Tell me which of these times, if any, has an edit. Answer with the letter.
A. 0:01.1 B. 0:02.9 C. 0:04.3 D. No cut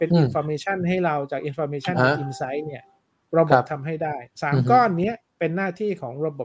C